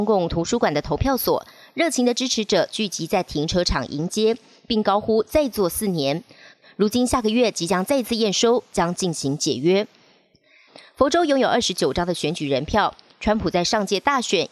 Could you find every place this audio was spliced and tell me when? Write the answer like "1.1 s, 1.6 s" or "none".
6.6 s, 8.7 s, 10.7 s